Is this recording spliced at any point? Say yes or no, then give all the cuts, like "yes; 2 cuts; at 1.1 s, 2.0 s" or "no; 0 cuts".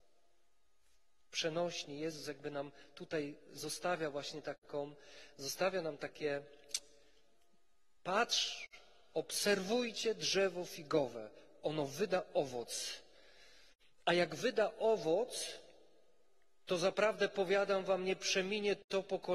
no; 0 cuts